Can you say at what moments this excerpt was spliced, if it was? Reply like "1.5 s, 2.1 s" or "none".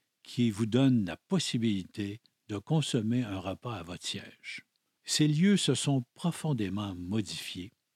5.0 s